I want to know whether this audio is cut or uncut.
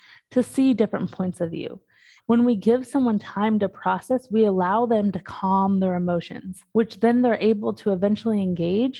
cut